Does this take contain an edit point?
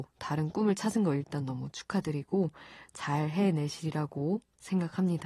no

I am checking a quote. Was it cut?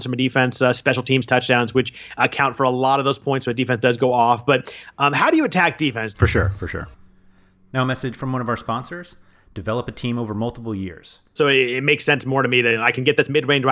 yes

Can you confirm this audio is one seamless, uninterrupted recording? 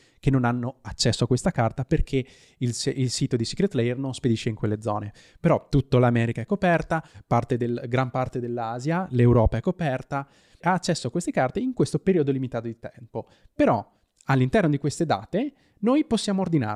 no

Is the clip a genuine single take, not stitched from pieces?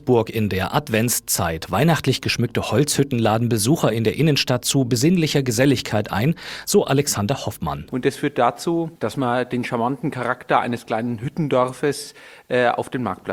yes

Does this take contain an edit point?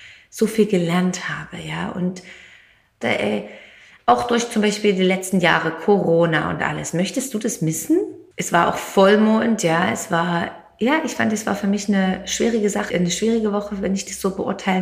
yes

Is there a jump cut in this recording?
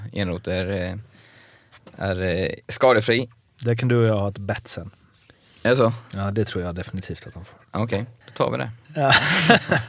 no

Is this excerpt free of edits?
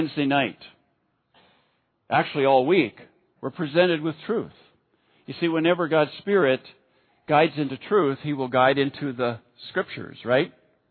no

